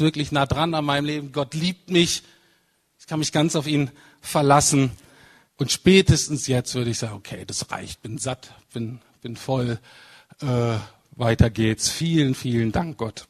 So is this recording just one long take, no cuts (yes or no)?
no